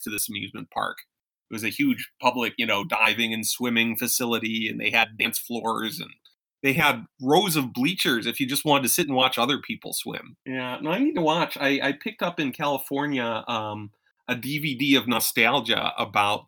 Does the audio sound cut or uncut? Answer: cut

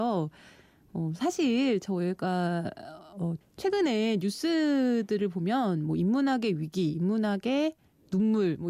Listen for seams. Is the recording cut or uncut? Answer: uncut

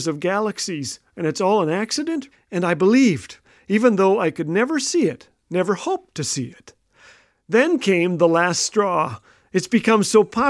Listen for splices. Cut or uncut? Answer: cut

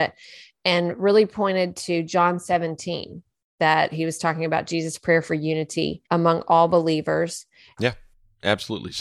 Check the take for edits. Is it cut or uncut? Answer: cut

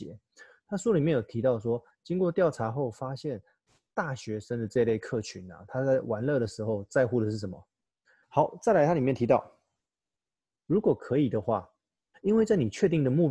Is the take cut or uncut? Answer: cut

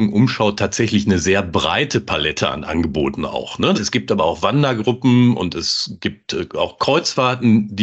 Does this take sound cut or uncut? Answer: cut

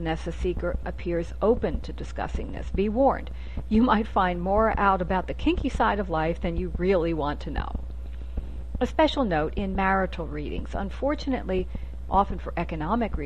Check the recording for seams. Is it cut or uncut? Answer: cut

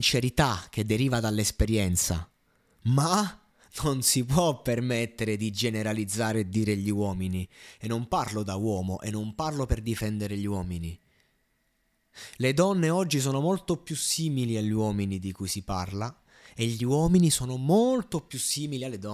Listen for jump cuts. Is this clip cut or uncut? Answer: uncut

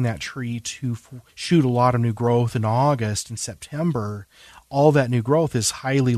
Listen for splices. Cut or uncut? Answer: cut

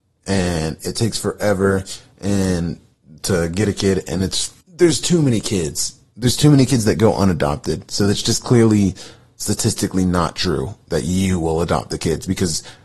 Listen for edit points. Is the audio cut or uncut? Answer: cut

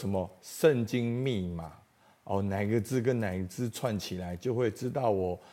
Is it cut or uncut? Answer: uncut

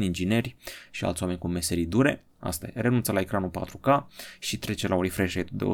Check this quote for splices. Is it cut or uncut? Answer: cut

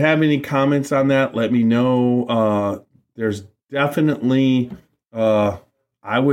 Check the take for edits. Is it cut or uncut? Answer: uncut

